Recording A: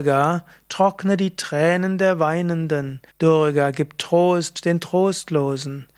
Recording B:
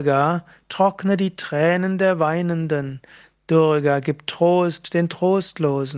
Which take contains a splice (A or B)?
A